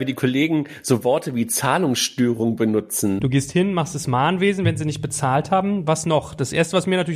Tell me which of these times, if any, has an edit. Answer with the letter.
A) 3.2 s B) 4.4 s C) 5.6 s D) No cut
A